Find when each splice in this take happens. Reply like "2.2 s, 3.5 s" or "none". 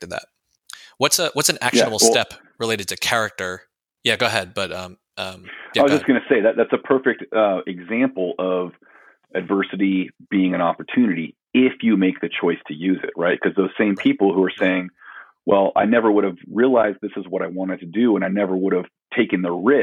none